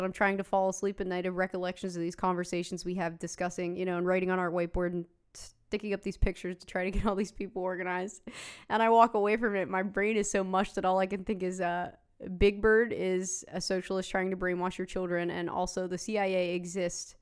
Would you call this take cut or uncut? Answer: uncut